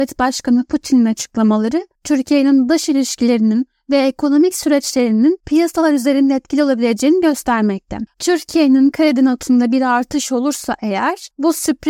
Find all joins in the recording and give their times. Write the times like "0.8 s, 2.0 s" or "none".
8.1 s

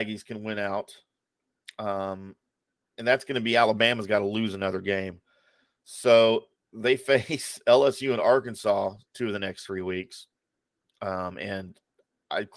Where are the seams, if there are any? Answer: none

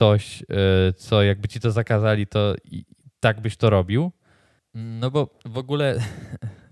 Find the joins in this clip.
4.6 s

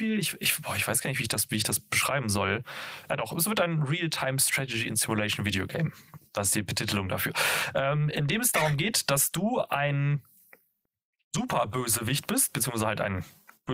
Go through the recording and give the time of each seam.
none

